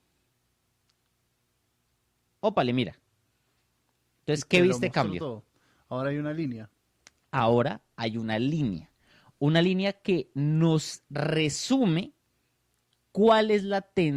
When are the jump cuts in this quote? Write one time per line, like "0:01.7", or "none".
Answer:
none